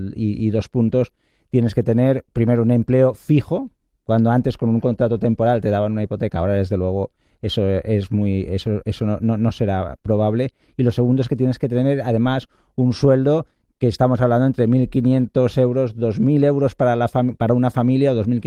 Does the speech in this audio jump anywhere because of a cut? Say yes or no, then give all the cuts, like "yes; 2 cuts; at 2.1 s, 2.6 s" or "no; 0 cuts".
no; 0 cuts